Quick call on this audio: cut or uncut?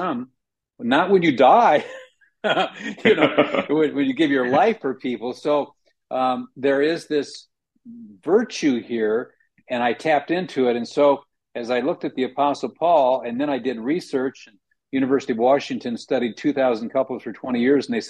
uncut